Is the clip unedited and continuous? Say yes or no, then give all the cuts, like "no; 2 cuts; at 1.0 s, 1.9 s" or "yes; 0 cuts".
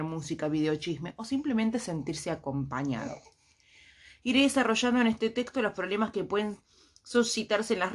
yes; 0 cuts